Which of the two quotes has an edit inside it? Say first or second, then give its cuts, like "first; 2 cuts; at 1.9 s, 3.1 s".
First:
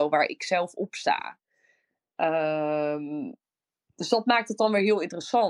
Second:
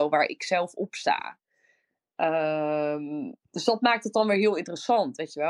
second; 1 cut; at 3.4 s